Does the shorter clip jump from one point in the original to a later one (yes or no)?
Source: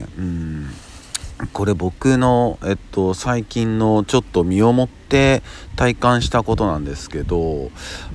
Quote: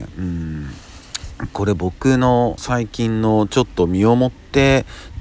yes